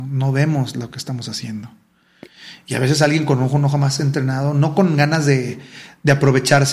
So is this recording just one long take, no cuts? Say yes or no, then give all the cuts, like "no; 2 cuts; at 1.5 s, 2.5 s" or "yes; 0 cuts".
yes; 0 cuts